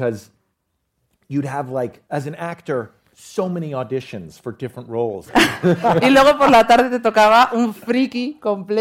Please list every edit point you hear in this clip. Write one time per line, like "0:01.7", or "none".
0:02.0
0:05.3